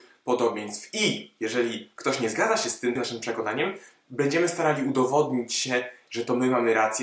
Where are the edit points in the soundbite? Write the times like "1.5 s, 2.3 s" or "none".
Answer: 3.0 s